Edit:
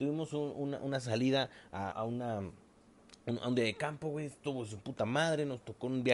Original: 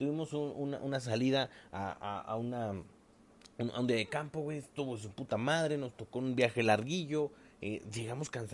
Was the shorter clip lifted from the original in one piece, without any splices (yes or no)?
no